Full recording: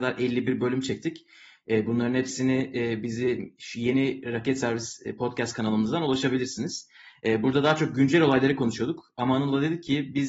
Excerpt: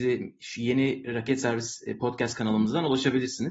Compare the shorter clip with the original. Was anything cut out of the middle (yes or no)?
no